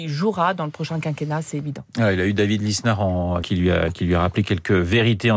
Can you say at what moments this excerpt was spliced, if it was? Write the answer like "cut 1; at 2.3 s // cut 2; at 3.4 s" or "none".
cut 1; at 3.4 s // cut 2; at 4.4 s

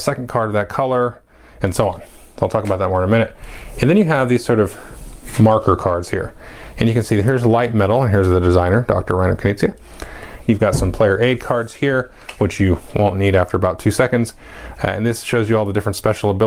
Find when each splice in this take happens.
cut 1; at 10.4 s

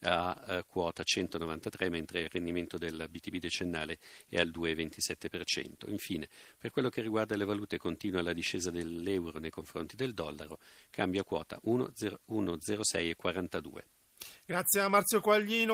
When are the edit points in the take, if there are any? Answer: none

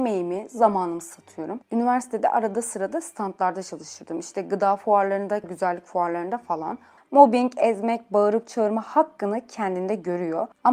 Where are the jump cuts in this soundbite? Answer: cut 1; at 5.4 s // cut 2; at 7.0 s

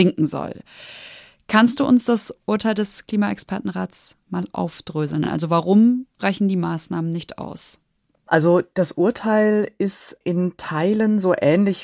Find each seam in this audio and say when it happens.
none

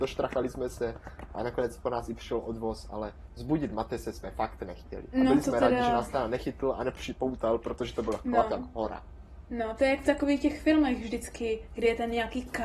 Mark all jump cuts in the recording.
cut 1; at 9.8 s

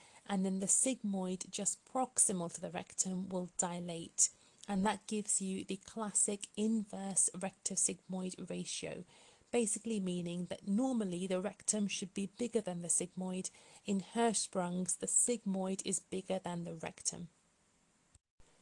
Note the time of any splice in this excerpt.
none

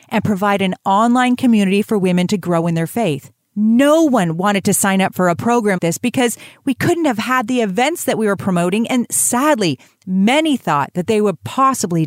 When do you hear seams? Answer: cut 1; at 3.5 s // cut 2; at 5.8 s

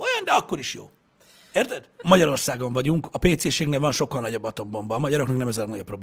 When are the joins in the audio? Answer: cut 1; at 2.0 s

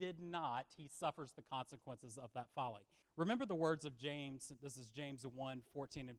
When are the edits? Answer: cut 1; at 3.0 s

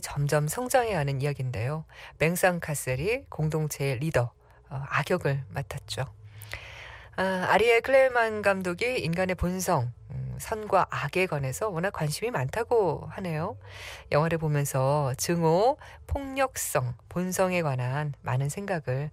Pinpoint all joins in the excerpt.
none

